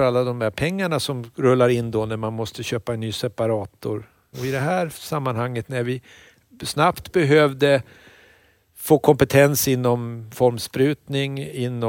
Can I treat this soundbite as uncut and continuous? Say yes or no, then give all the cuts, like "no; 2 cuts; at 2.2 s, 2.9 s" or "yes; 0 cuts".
no; 1 cut; at 4.3 s